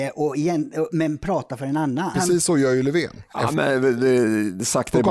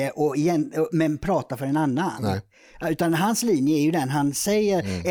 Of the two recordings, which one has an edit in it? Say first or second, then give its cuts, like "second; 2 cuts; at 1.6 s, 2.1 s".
first; 2 cuts; at 2.1 s, 3.3 s